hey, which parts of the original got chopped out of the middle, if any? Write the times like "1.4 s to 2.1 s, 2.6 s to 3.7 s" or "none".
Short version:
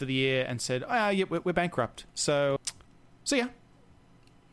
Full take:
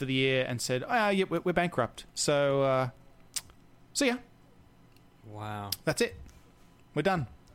2.6 s to 3.2 s